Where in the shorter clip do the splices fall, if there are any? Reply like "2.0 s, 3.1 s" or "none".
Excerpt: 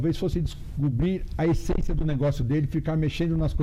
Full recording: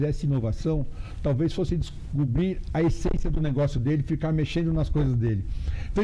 none